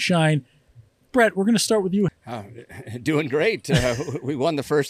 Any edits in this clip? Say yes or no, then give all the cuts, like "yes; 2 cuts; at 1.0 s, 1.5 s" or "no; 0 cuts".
yes; 1 cut; at 2.1 s